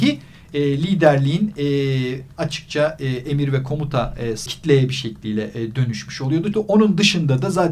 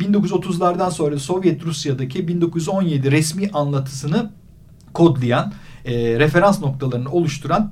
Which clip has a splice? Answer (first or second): first